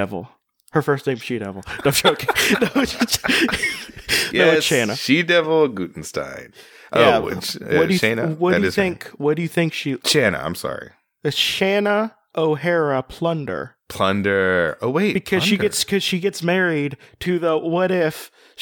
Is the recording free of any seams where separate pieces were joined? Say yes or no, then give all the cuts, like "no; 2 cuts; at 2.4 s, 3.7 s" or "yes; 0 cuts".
no; 2 cuts; at 10.0 s, 13.8 s